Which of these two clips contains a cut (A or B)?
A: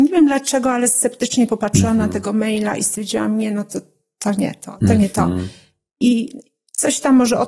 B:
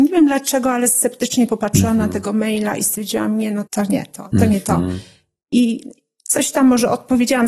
B